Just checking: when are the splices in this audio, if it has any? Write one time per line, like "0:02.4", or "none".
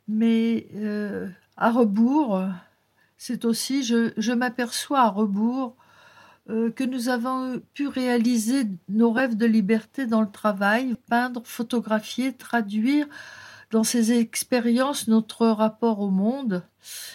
0:10.9